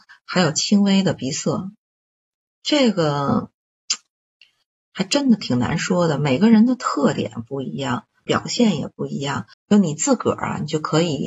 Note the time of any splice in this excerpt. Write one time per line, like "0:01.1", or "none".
0:08.3
0:09.5

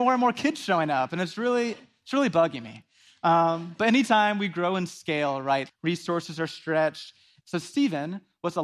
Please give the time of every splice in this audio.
0:05.7
0:07.4

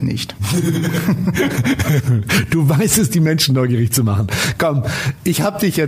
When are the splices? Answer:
none

